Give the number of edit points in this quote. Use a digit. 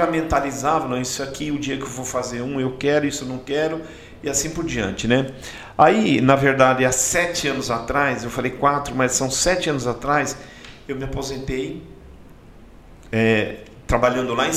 0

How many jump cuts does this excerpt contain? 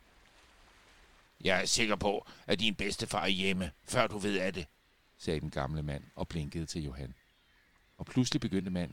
1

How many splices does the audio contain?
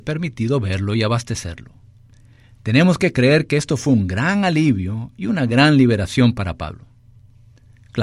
0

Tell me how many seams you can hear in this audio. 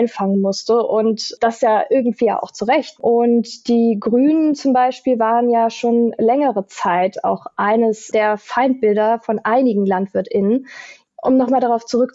1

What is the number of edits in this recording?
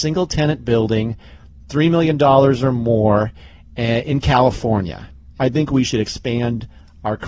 1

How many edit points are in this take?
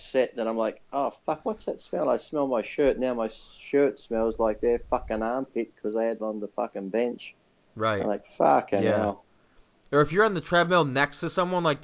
0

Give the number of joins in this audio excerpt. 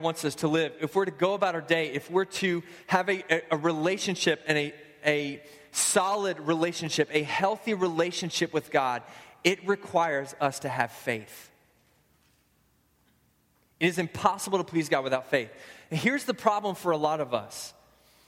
0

